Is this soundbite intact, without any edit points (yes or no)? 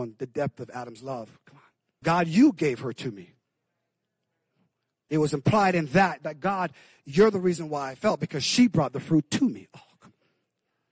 no